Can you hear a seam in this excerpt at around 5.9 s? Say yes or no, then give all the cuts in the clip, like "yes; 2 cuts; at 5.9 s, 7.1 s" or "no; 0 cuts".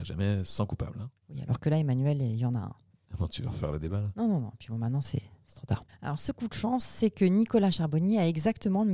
yes; 1 cut; at 5.9 s